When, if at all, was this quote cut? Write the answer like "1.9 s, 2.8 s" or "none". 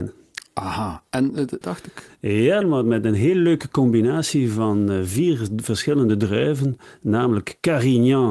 1.6 s, 2.6 s